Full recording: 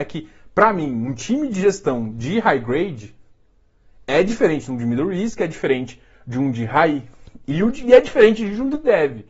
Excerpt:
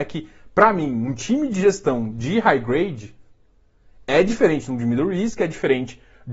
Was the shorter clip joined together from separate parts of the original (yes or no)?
no